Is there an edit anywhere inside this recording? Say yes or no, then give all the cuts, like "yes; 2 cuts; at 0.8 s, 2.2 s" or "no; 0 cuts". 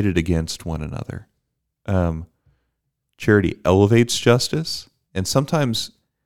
no; 0 cuts